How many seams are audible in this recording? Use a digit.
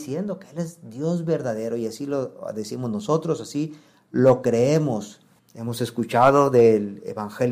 1